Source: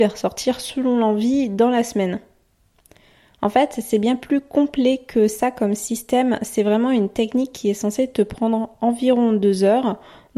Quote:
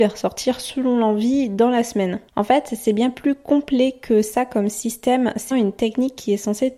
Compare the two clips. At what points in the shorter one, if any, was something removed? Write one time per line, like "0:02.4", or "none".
0:02.3
0:05.5